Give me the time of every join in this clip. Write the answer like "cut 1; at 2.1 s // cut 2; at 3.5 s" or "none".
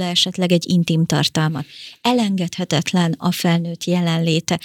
none